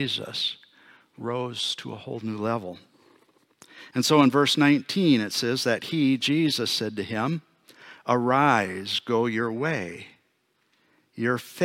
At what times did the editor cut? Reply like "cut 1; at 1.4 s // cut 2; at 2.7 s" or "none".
none